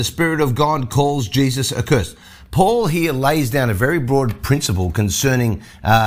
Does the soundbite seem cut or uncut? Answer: uncut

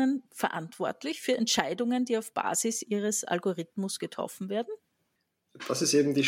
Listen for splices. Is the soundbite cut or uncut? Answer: uncut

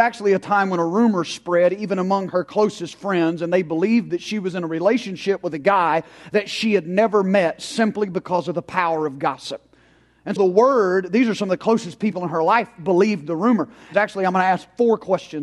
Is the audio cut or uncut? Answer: cut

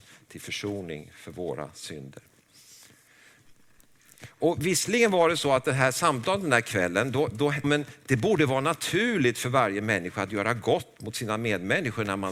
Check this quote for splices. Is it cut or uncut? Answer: cut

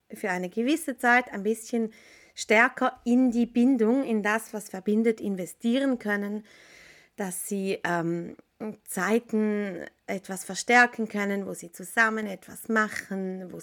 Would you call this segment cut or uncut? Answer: uncut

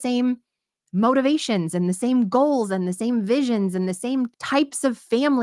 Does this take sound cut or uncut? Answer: cut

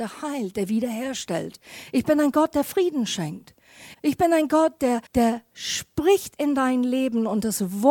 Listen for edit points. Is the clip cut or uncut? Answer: cut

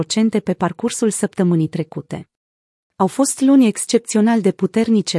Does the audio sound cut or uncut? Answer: cut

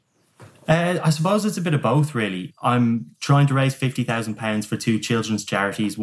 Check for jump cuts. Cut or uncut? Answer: uncut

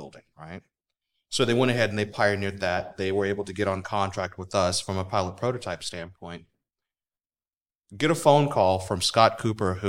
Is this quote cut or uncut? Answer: uncut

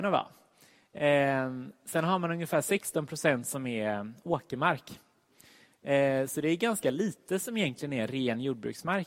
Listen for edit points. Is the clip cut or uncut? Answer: uncut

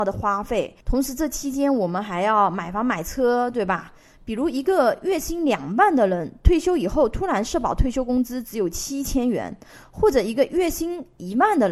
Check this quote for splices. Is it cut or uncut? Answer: cut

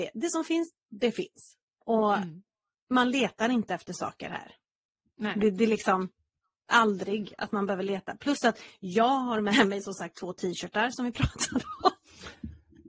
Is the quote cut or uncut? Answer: uncut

